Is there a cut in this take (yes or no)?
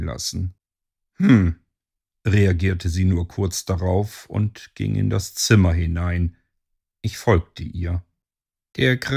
no